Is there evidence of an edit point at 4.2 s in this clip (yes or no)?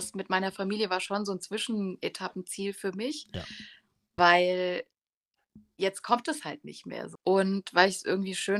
yes